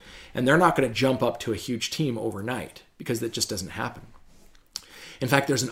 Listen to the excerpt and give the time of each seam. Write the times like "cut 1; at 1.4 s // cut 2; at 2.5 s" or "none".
none

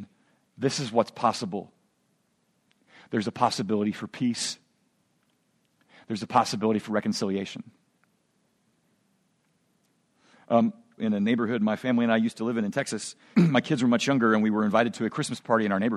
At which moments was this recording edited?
cut 1; at 11.0 s // cut 2; at 13.3 s

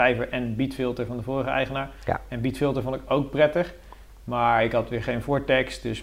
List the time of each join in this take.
none

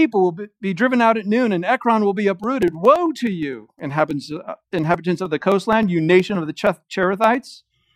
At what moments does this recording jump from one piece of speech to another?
none

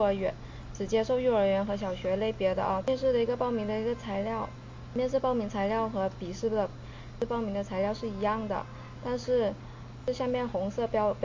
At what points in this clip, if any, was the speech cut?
cut 1; at 2.8 s

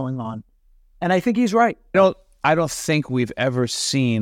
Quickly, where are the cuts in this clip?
cut 1; at 1.9 s

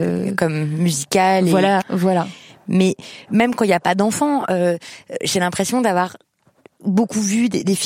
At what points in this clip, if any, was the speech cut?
cut 1; at 1.8 s

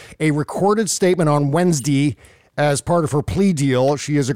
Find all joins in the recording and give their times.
none

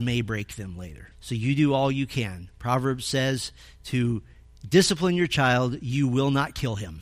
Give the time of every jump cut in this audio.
cut 1; at 1.1 s

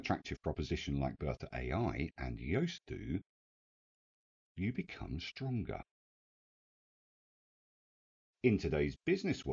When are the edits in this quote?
none

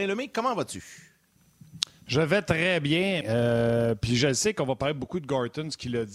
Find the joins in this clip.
cut 1; at 3.2 s

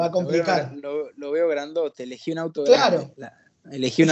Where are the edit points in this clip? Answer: none

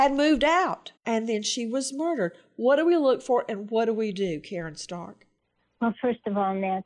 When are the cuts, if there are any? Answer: cut 1; at 1.0 s

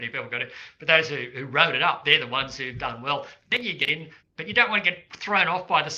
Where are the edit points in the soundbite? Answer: cut 1; at 4.2 s

